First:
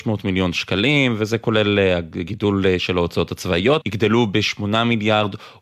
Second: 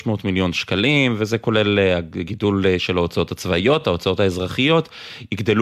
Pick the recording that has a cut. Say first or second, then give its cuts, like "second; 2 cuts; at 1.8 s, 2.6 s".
first; 1 cut; at 3.8 s